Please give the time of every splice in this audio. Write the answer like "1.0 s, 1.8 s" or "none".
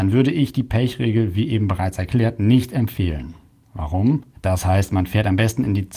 4.3 s